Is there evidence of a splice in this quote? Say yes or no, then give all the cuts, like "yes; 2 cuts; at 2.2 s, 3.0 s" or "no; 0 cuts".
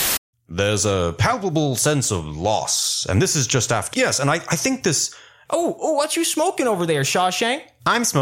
yes; 2 cuts; at 3.9 s, 5.5 s